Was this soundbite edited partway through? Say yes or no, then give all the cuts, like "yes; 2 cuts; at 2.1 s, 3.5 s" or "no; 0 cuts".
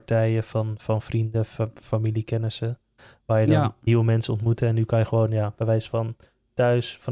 no; 0 cuts